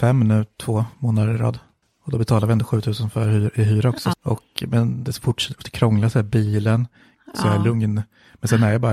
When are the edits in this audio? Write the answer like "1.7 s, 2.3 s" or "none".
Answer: 4.1 s, 7.1 s